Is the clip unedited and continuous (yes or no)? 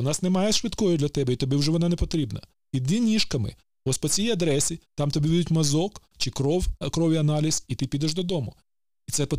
yes